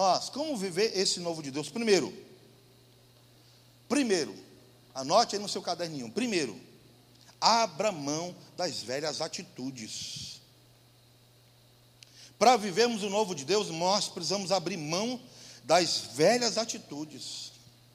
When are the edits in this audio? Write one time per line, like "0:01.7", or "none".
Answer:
none